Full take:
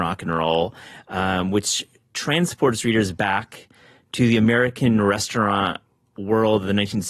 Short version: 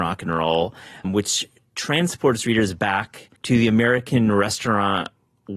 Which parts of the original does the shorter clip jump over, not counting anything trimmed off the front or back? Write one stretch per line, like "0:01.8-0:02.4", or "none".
0:01.0-0:01.4
0:03.7-0:04.1